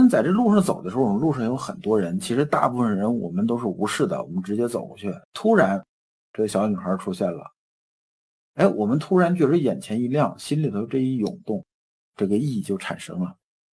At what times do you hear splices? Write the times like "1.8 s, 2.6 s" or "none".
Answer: 5.2 s